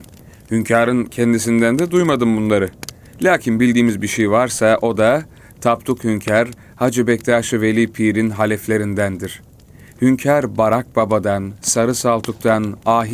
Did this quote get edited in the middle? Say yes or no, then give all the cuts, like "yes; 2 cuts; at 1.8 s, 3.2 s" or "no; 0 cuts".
no; 0 cuts